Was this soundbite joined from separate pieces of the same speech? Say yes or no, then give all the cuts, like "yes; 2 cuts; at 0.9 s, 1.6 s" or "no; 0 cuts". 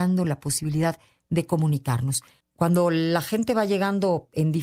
yes; 1 cut; at 2.4 s